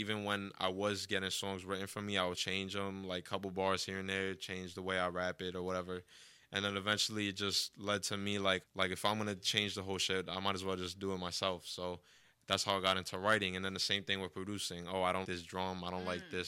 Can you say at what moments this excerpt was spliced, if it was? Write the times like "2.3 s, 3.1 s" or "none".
2.3 s, 8.6 s, 15.2 s